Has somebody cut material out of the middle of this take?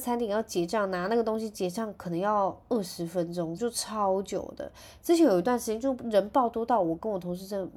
yes; 1 cut; at 3.6 s

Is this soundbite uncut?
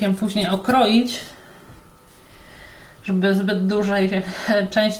yes; 0 cuts

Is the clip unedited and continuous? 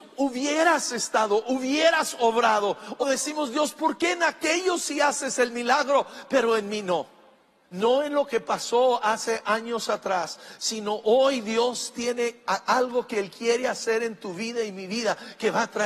no; 2 cuts; at 3.0 s, 7.6 s

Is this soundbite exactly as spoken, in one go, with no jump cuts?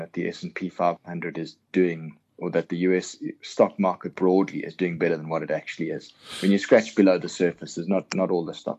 yes; 0 cuts

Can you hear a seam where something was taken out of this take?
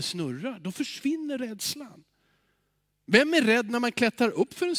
no; 0 cuts

